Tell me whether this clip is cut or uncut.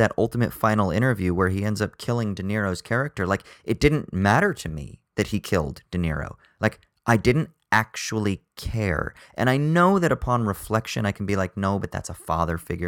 uncut